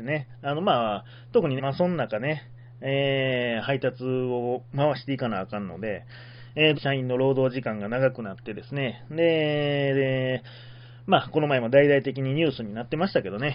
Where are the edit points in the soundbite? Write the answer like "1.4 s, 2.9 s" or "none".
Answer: 1.6 s, 6.7 s